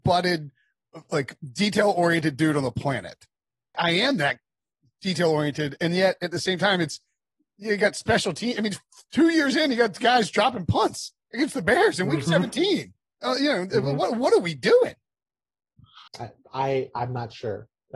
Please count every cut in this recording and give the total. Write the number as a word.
two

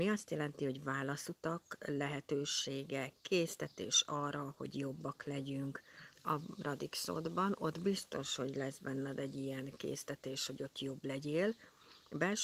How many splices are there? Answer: one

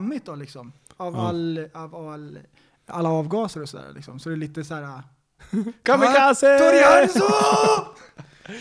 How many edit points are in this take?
one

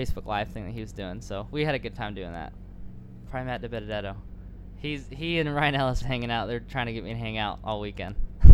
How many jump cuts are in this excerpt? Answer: two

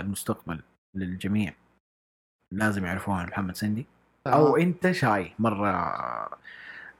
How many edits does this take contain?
one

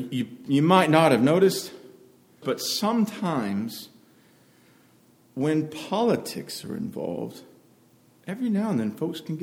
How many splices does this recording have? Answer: one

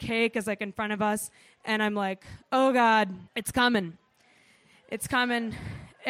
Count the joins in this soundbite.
one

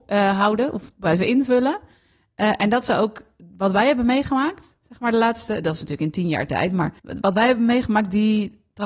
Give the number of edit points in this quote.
one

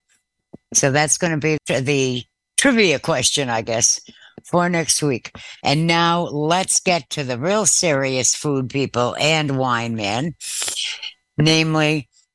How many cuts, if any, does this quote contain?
two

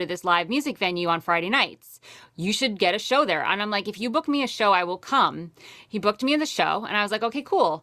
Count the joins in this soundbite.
zero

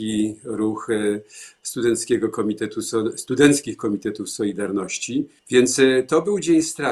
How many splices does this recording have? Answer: one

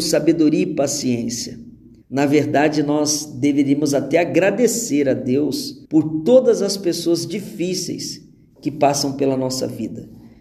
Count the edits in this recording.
two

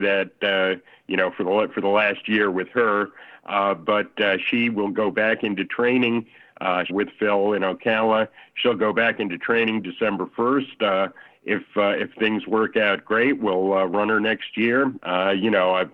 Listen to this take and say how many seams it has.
two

